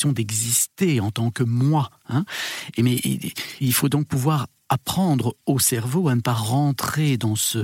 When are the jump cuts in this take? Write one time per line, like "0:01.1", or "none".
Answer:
0:03.6